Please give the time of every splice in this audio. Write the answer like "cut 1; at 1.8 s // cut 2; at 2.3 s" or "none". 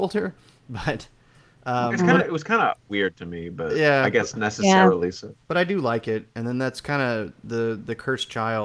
none